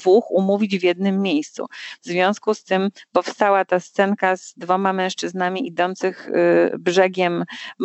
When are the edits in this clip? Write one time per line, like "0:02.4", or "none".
none